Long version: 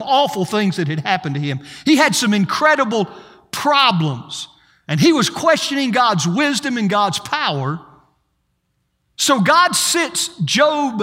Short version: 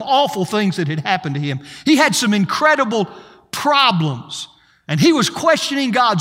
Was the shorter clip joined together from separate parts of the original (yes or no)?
no